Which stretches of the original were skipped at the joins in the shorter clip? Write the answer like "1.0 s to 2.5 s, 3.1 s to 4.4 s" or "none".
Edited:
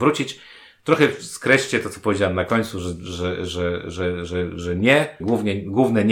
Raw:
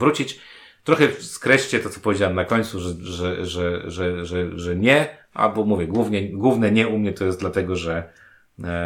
5.2 s to 5.9 s